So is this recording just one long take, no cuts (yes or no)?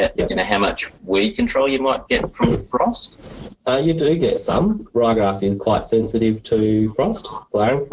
yes